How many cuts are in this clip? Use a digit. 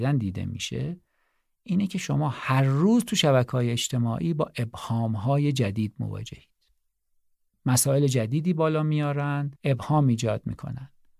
1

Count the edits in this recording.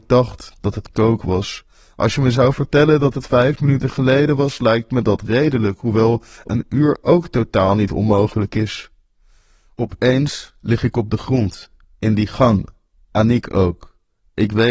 0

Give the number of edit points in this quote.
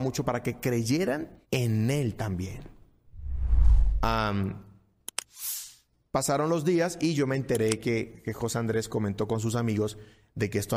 1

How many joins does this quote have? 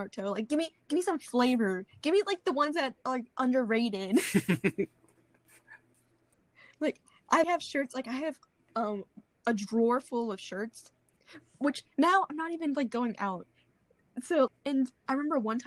2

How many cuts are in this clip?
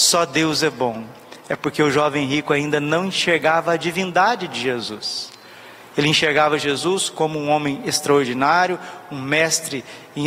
0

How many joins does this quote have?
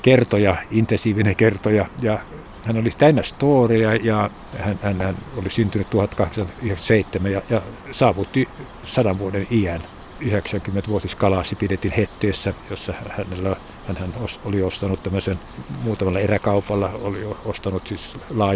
1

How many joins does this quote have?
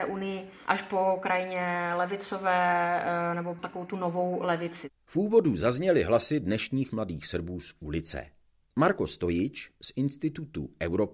0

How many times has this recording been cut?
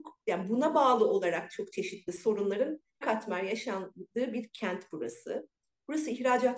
1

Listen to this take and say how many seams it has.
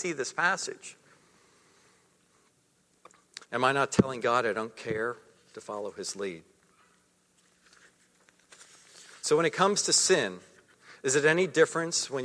1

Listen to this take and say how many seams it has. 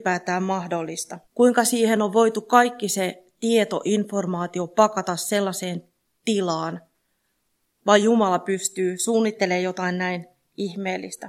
1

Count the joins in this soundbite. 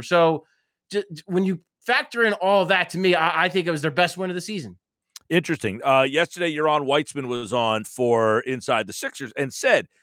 0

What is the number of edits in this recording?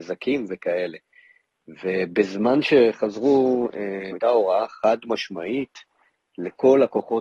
1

